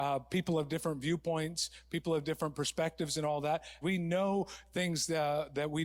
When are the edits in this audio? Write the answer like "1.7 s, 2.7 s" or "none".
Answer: 3.8 s